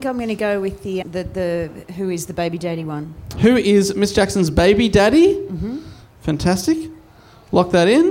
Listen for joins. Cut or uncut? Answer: cut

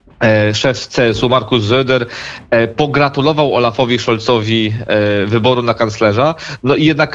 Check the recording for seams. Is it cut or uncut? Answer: uncut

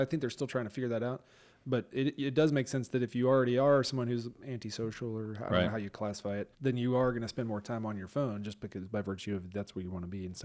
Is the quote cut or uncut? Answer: cut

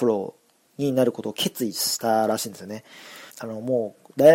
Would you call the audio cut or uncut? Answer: cut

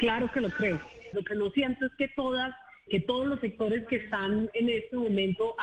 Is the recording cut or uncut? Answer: cut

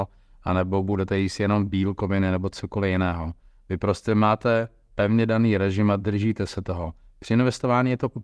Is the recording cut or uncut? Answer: uncut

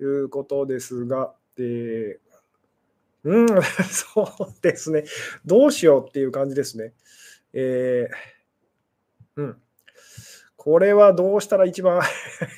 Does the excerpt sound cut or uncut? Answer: uncut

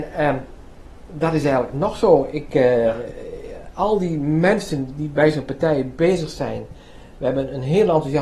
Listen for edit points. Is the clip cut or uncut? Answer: uncut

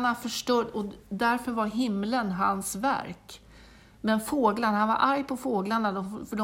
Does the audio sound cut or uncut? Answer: uncut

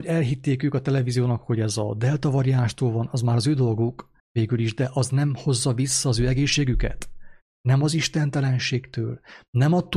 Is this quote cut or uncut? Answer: cut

